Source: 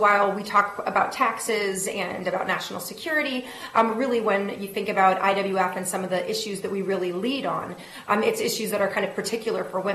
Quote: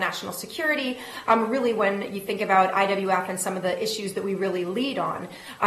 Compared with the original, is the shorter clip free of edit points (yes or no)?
yes